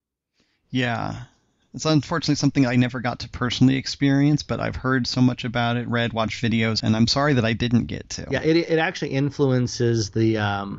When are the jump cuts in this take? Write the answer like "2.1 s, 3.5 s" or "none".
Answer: 6.8 s